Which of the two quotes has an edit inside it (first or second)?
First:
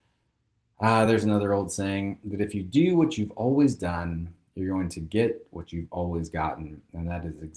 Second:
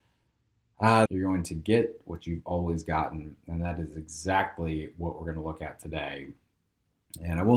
second